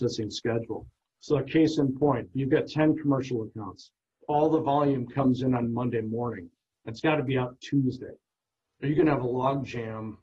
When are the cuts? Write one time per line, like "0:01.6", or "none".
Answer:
none

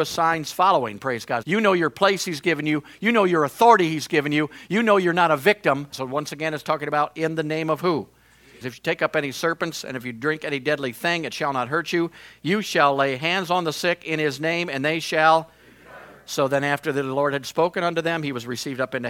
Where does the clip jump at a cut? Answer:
0:01.4
0:05.9
0:08.6

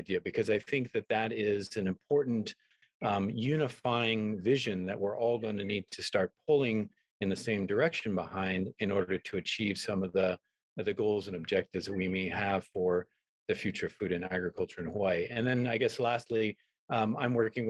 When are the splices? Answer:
none

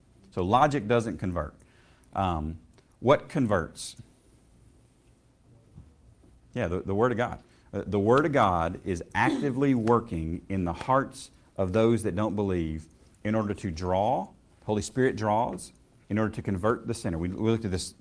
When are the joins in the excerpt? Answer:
none

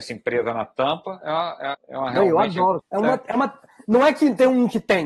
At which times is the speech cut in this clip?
0:01.7
0:02.8

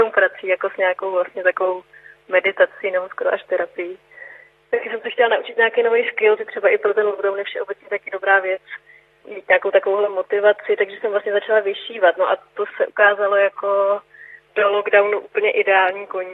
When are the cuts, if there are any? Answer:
0:06.4

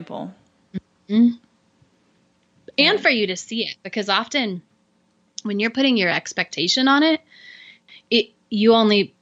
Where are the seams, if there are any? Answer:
none

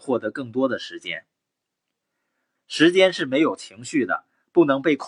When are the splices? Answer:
0:02.5

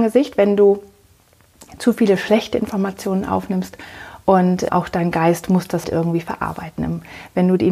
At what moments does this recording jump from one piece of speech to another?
0:04.7
0:05.8

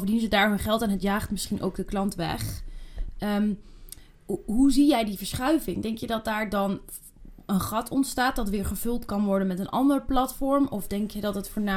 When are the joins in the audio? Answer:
none

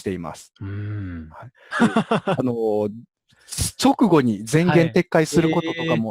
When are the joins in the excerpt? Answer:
0:01.7

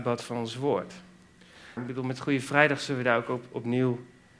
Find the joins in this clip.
0:01.8

